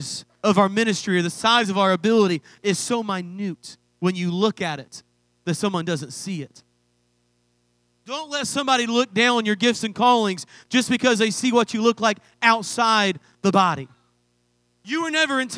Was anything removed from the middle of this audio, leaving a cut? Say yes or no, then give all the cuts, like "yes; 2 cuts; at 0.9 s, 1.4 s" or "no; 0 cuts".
no; 0 cuts